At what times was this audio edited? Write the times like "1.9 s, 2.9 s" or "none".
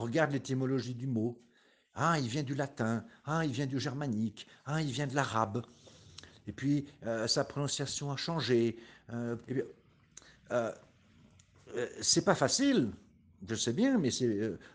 9.4 s

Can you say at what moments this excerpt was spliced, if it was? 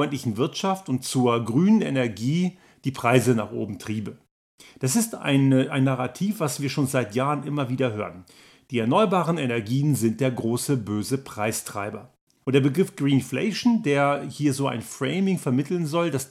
12.4 s

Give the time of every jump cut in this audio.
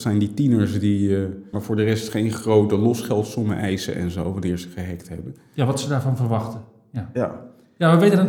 1.5 s

